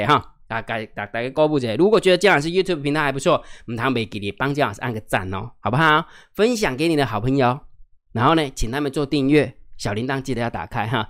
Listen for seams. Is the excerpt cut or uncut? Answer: uncut